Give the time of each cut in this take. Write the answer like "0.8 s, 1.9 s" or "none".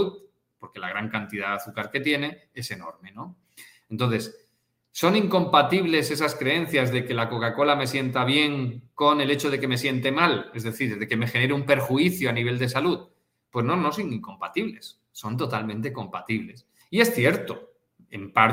16.8 s